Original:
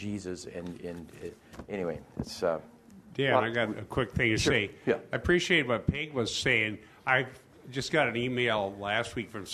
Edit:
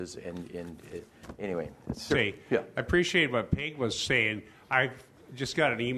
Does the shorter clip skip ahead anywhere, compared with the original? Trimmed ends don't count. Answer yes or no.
yes